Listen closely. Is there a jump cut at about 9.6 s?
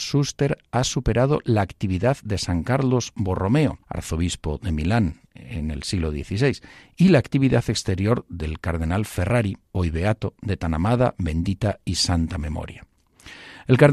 yes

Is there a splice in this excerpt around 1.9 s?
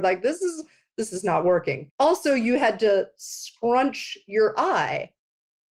yes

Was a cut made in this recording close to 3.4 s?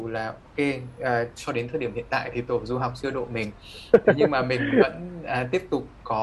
no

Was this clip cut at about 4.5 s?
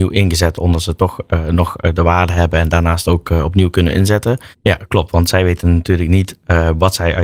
yes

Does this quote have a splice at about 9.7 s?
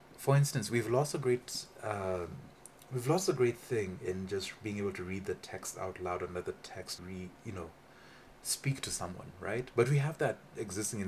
no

